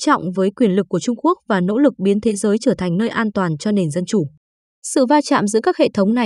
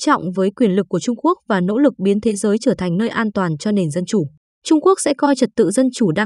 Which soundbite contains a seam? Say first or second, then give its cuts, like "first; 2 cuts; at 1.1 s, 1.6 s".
second; 1 cut; at 4.4 s